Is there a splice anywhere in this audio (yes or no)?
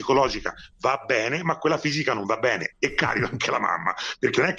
yes